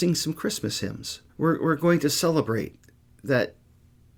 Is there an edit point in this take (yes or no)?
yes